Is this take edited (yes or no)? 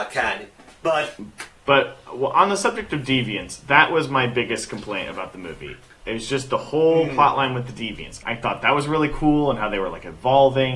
yes